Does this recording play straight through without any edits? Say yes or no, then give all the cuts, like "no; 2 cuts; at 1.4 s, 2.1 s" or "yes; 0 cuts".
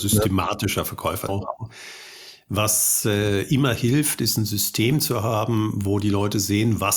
no; 1 cut; at 1.3 s